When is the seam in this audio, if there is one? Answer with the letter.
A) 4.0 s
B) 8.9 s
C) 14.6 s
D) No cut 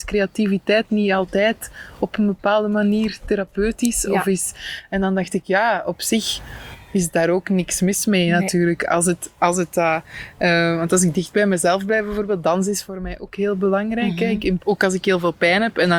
C